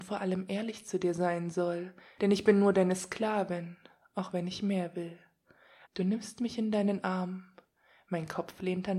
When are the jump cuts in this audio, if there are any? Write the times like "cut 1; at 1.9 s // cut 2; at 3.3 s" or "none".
cut 1; at 2.2 s // cut 2; at 5.8 s